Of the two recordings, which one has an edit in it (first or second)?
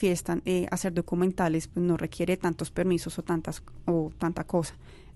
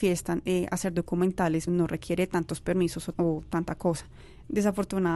second